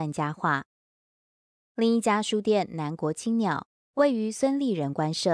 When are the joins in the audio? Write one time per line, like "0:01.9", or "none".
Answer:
none